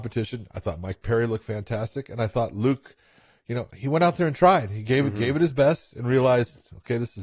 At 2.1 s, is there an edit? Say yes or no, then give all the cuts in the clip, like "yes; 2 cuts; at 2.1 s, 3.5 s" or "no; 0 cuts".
no; 0 cuts